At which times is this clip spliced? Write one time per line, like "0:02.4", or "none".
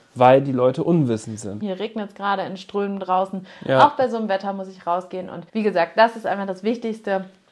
0:01.6
0:05.5